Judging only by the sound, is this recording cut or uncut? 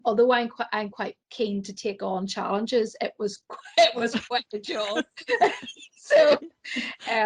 cut